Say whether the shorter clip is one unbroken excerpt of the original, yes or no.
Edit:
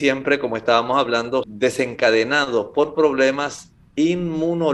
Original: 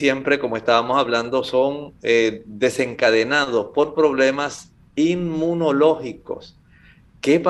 no